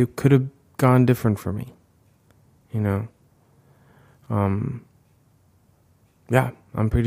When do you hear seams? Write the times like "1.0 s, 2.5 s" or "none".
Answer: none